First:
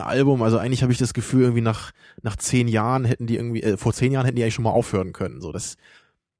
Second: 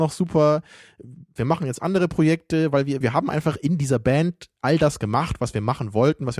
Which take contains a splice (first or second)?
second